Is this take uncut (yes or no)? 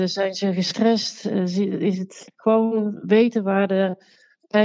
yes